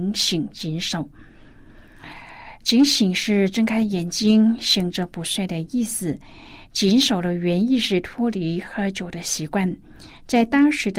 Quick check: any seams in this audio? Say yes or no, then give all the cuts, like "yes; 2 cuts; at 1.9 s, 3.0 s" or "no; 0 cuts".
no; 0 cuts